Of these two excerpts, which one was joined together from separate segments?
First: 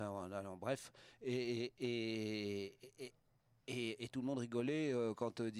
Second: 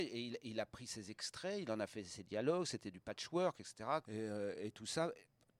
second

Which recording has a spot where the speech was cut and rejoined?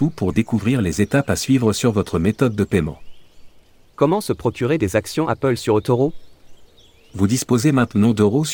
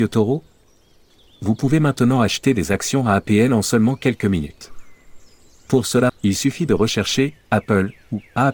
second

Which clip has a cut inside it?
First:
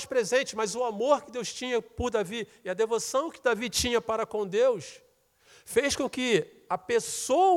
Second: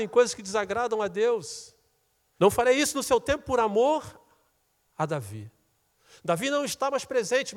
second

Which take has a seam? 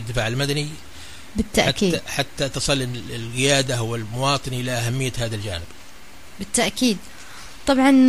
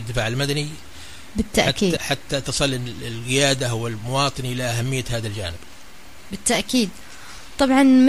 second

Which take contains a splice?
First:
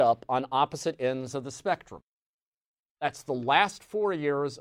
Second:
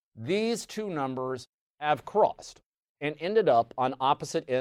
first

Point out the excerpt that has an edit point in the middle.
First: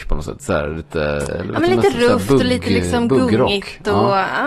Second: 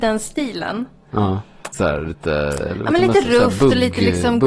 second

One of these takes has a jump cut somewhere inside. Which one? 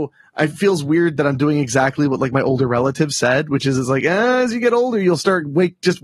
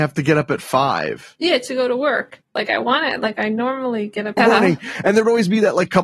second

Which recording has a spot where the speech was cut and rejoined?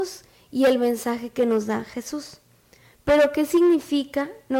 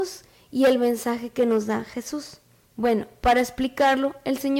second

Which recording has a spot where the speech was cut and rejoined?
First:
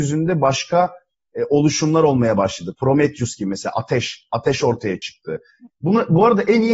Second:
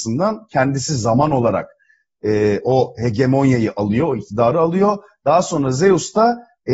first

